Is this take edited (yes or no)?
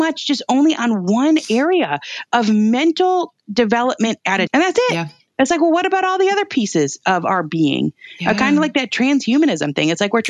yes